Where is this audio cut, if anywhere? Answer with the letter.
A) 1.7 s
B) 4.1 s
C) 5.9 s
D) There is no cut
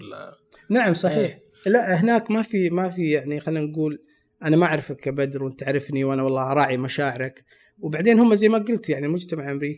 D